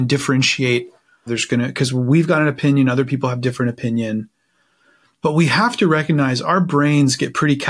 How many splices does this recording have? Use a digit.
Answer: 1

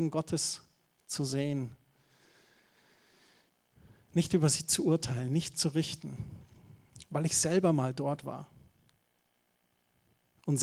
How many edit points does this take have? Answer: 0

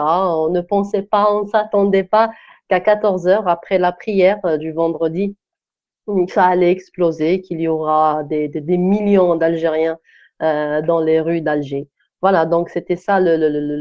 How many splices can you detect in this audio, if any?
0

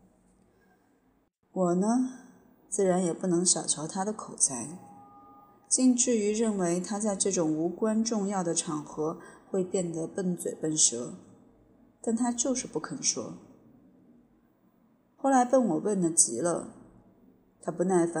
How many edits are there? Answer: 0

